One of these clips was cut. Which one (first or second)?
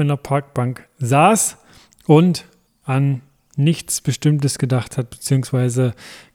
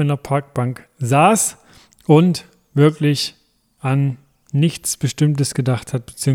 first